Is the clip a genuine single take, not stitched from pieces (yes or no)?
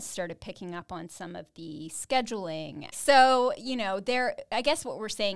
no